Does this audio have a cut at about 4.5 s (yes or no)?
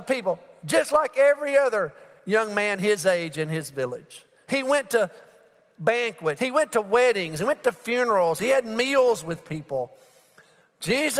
yes